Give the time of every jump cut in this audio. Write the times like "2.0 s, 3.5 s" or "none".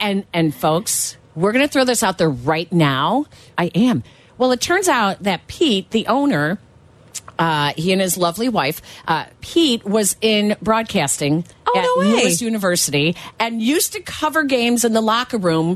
3.5 s